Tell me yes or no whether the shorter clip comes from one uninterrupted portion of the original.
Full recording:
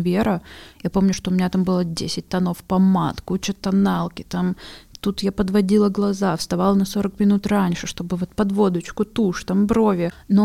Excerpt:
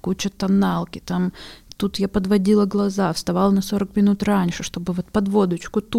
yes